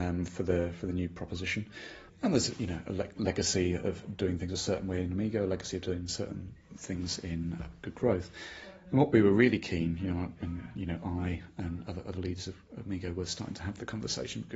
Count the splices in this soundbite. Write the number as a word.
zero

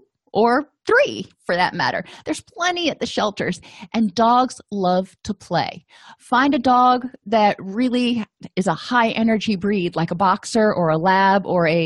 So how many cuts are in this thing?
zero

